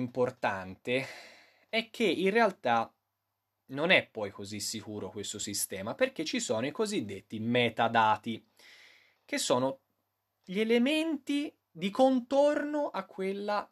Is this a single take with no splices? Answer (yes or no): yes